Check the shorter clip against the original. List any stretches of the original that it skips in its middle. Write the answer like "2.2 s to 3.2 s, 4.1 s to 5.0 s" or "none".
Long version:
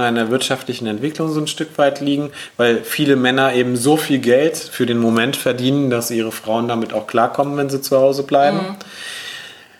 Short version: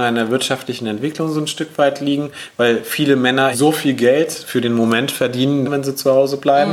3.5 s to 3.8 s, 5.9 s to 7.5 s